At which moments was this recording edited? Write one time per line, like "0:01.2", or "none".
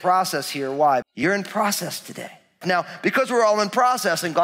0:01.0
0:02.6